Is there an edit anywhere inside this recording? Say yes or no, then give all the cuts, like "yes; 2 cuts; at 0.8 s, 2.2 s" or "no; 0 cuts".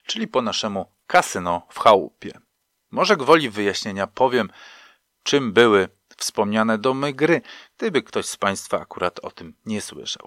yes; 1 cut; at 2.8 s